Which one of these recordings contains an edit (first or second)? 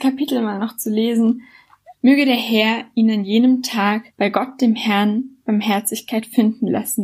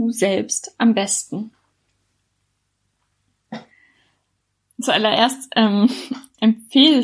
first